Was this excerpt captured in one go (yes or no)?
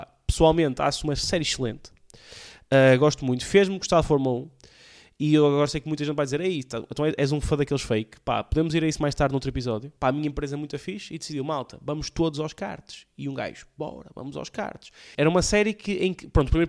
no